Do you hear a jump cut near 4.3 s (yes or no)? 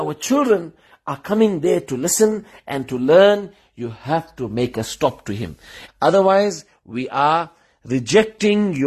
no